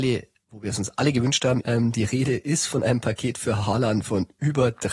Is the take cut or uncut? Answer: cut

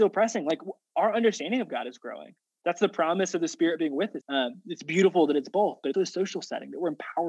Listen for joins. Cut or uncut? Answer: cut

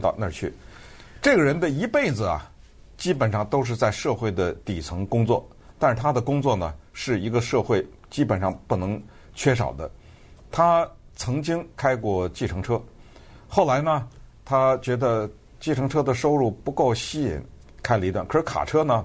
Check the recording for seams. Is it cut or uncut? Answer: cut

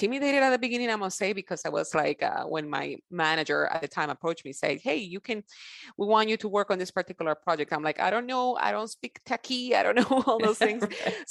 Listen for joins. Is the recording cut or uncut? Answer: uncut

